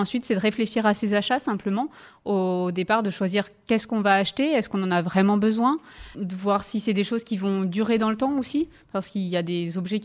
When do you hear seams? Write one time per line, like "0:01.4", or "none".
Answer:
0:06.1